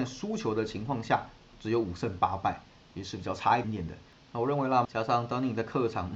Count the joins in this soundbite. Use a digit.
2